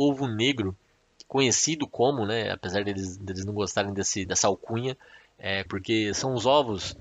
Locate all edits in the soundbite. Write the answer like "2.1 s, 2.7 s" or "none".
4.2 s, 5.7 s